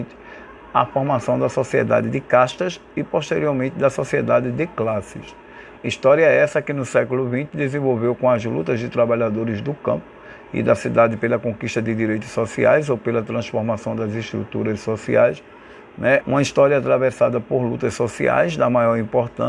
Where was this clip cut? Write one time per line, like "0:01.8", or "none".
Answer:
0:05.8
0:16.2